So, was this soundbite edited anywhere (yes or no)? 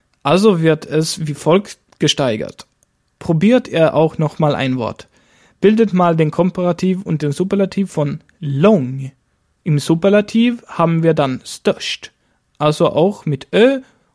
yes